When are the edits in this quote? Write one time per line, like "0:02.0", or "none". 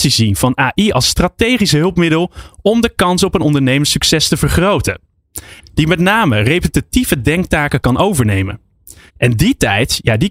0:05.6
0:09.1

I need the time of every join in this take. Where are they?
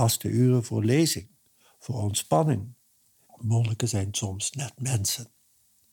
0:03.2

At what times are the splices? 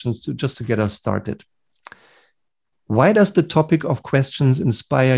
none

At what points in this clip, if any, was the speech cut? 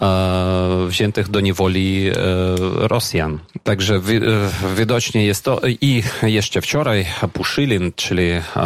0:03.6

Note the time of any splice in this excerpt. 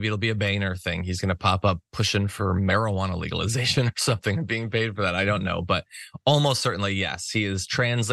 none

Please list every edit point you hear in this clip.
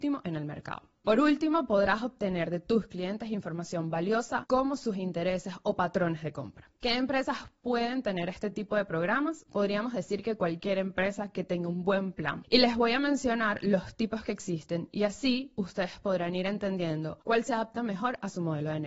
none

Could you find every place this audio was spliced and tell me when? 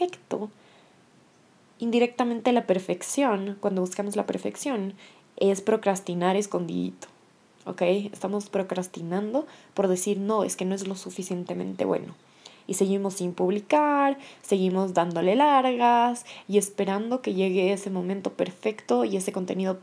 none

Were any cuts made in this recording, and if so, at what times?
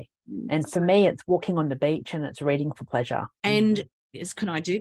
0:03.3

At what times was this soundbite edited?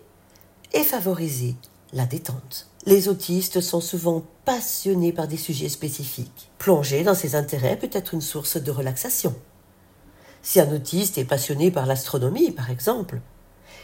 0:02.7
0:06.5

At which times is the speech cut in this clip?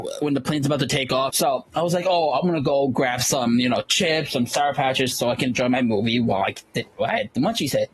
0:01.3
0:05.1

